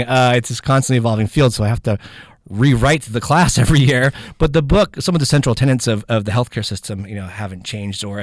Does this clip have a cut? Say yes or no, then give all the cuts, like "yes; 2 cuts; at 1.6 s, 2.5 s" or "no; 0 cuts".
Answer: no; 0 cuts